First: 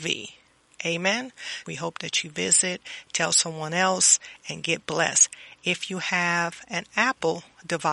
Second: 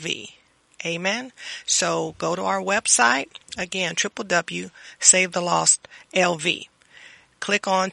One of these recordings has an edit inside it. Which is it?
first; 1 cut; at 1.6 s

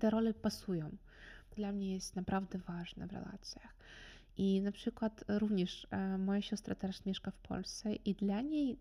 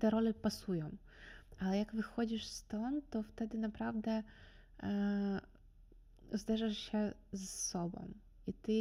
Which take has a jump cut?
first; 1 cut; at 1.6 s

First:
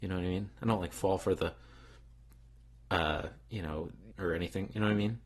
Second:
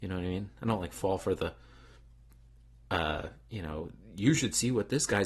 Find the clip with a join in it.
first; 1 cut; at 4.1 s

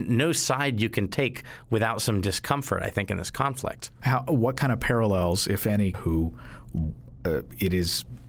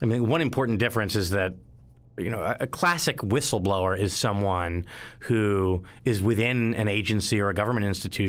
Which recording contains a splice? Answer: first; 1 cut; at 5.9 s

